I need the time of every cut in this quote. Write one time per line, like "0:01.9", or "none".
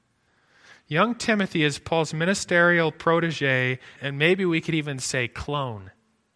0:04.0